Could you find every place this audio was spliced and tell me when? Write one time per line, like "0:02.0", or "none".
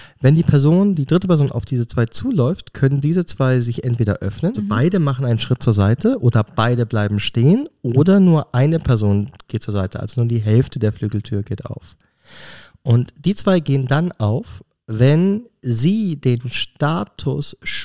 0:04.5